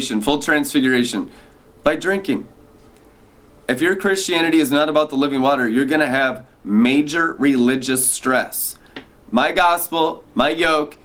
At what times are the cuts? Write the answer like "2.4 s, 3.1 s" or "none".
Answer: 3.7 s, 9.2 s